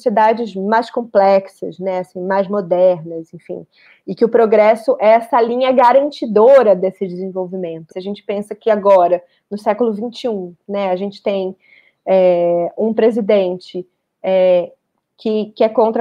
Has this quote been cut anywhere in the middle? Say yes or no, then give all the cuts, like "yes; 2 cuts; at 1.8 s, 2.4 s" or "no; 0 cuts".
yes; 1 cut; at 7.9 s